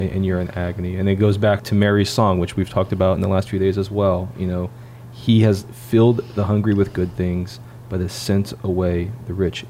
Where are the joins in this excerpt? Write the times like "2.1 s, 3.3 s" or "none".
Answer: 1.6 s